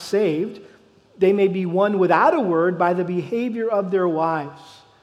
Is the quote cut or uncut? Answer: uncut